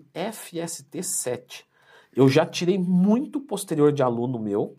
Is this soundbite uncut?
no; 1 cut; at 2.0 s

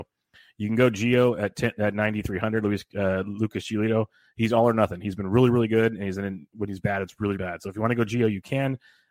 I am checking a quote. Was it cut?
yes; 1 cut; at 7.3 s

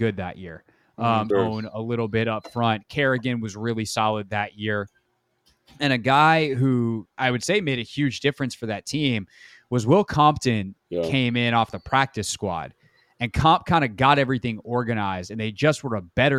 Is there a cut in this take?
yes; 1 cut; at 1.3 s

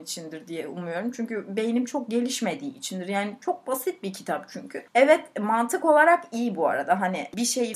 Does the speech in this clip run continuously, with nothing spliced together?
yes; 0 cuts

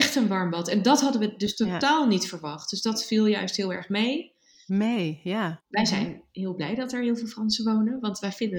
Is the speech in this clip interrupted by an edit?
yes; 1 cut; at 5.6 s

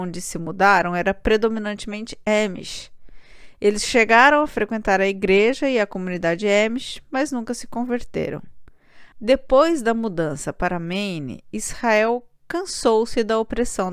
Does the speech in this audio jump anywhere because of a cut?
yes; 1 cut; at 9.1 s

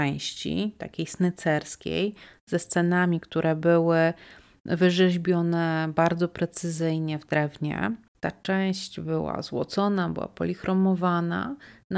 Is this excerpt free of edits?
no; 1 cut; at 8.1 s

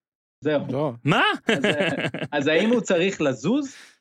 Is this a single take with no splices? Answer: no; 1 cut; at 1.5 s

